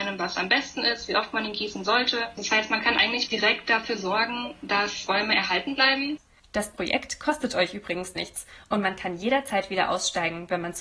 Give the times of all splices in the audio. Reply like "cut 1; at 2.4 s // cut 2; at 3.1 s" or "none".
cut 1; at 3.3 s